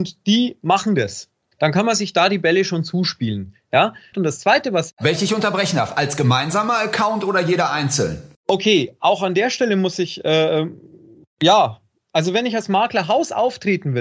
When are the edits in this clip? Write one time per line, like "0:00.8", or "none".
0:01.5
0:04.1
0:08.3